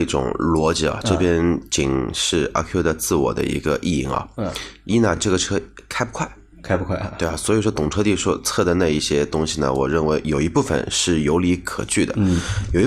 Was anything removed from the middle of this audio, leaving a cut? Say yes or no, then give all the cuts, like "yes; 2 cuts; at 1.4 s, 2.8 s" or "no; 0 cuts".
no; 0 cuts